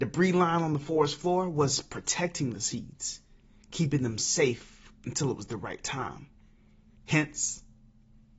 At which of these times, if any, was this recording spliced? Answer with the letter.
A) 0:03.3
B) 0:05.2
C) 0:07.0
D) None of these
C